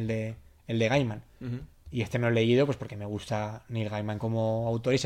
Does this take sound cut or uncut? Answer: uncut